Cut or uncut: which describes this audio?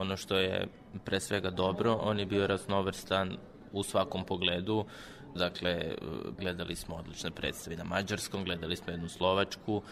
cut